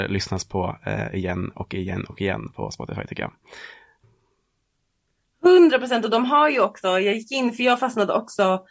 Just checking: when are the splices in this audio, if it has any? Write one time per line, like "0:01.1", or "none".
none